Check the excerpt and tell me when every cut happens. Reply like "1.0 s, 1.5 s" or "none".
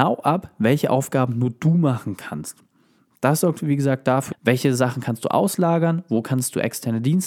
4.3 s